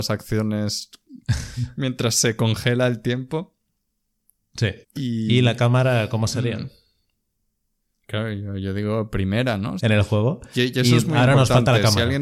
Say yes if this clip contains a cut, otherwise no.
yes